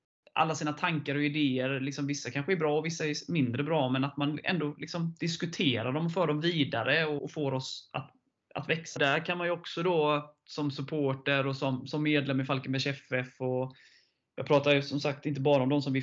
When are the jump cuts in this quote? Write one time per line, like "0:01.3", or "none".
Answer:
0:07.2
0:09.0